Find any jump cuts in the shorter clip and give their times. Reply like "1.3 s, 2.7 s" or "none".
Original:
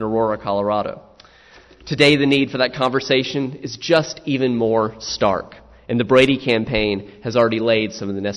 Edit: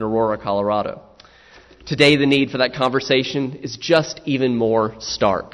none